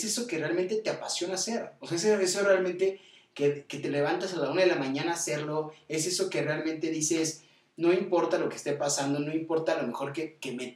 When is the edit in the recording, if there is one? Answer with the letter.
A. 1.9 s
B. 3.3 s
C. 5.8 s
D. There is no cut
D